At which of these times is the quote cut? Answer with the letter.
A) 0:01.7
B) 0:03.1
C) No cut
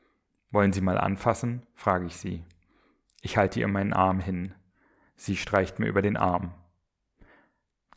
C